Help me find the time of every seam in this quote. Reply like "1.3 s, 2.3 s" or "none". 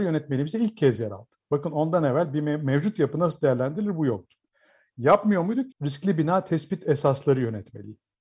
5.7 s